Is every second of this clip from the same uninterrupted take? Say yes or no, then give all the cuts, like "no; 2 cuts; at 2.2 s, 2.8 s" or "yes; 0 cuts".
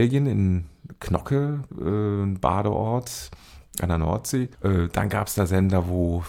no; 1 cut; at 4.6 s